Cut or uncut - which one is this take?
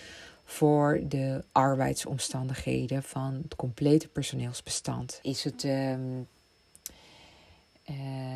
cut